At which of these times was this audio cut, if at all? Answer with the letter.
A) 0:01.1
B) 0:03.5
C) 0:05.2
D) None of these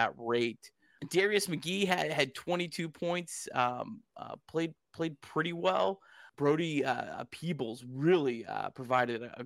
D